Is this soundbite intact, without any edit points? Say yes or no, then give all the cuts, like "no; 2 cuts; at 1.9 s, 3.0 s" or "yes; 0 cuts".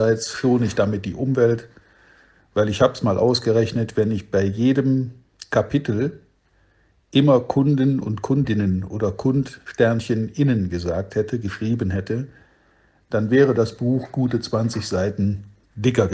yes; 0 cuts